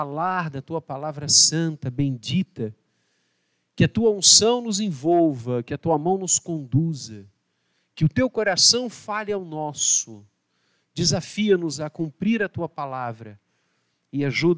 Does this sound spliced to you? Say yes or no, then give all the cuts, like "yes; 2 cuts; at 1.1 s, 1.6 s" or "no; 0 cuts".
no; 0 cuts